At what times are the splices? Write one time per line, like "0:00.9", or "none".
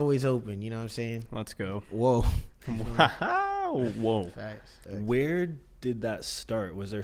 0:04.8